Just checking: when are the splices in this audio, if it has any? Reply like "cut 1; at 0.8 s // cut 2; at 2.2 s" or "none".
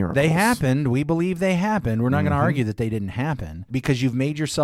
cut 1; at 3.7 s

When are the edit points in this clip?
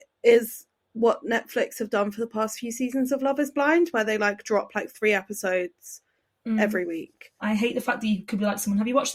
cut 1; at 7.4 s

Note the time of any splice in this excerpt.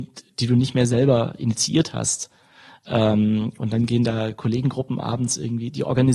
none

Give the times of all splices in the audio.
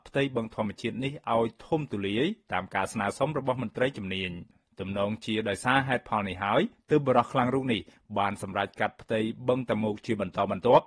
none

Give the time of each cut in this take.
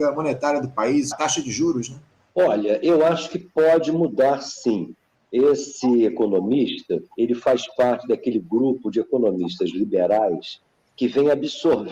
cut 1; at 1.1 s // cut 2; at 7.1 s

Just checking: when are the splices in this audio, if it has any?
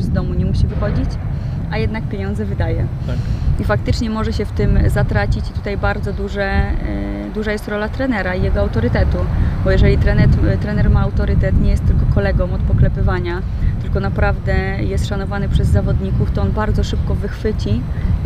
none

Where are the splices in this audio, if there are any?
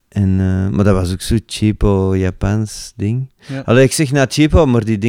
none

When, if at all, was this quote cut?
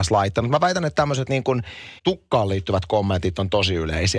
cut 1; at 2.0 s

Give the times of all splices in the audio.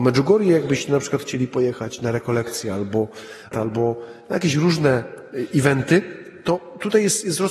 cut 1; at 3.5 s

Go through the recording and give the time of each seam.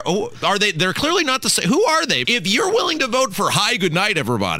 cut 1; at 2.2 s

